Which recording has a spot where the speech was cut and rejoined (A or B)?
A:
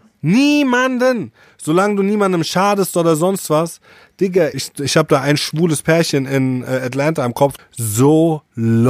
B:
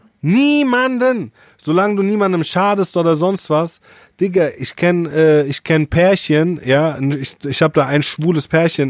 A